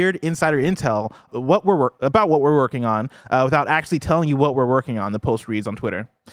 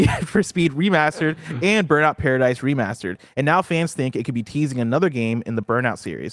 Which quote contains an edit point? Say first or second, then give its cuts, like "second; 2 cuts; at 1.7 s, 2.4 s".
first; 1 cut; at 1.3 s